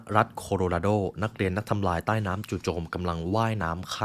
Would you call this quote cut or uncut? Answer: uncut